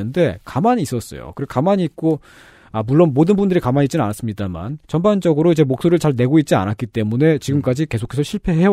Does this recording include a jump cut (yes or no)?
yes